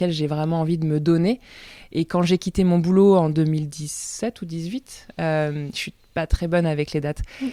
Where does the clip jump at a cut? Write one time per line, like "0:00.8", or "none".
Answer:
none